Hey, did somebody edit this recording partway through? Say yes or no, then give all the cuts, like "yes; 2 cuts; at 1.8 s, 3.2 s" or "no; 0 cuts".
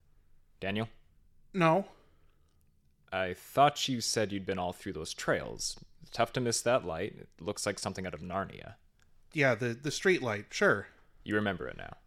yes; 1 cut; at 9.3 s